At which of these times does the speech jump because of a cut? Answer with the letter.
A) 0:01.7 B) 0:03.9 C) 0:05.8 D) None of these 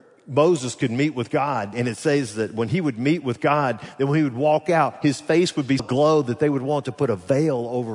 C